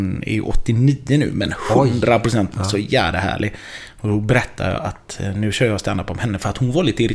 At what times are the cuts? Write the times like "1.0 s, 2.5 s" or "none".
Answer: 2.5 s